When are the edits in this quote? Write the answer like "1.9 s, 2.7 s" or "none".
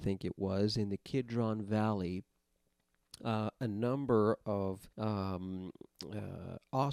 4.9 s